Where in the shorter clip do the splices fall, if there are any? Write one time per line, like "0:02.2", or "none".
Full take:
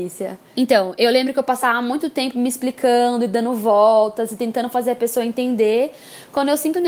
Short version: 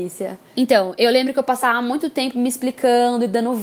none

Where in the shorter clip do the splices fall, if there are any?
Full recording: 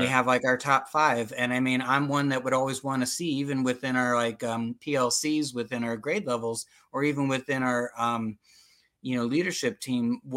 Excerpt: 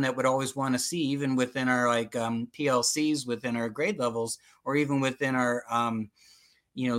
none

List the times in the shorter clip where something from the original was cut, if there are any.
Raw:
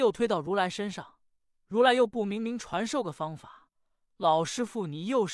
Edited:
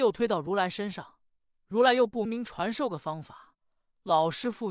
0:02.3

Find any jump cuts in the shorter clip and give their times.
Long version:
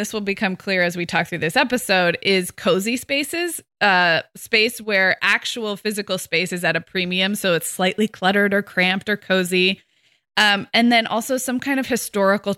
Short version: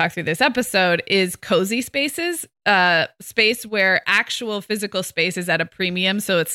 none

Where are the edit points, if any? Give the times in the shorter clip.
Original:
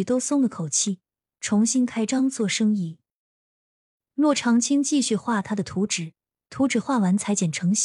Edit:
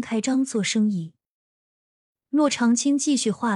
none

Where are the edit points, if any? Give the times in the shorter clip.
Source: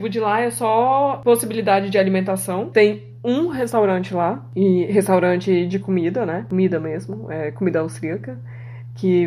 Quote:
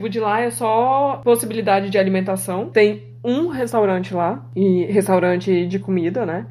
none

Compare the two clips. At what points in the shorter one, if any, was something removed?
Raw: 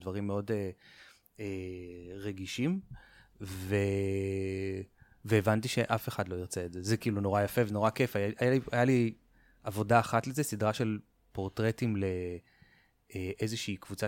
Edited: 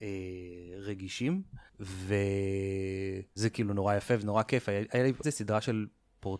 0:01.7
0:03.4
0:05.2

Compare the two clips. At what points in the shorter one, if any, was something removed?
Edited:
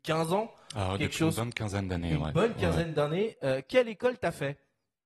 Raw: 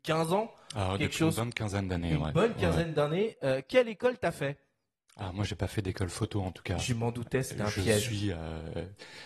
none

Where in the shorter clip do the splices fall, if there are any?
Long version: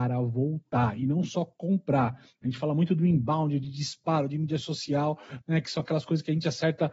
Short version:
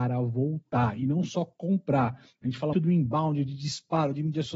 0:02.7

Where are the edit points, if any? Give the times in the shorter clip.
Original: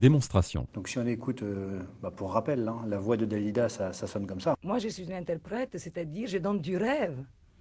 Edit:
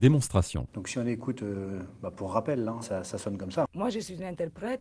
0:02.8

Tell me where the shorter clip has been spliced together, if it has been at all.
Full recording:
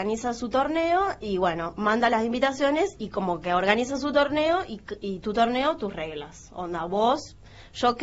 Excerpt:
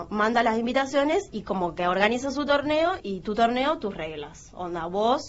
0:03.0

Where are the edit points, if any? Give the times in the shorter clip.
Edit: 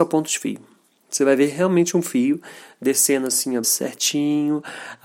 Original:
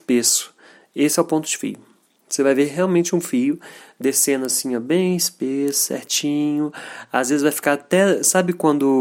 0:03.6

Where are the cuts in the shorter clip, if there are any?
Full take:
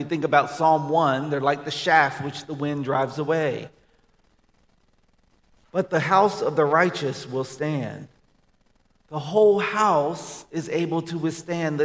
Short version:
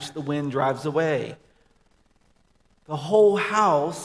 0:02.7

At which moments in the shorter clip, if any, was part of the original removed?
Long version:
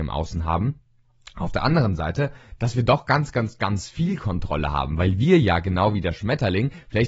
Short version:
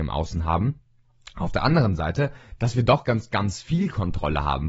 0:03.0

